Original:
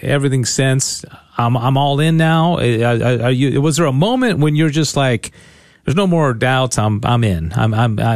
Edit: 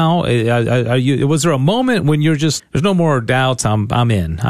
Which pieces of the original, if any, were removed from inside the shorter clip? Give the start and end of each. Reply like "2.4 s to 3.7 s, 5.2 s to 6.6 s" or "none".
4.9 s to 5.7 s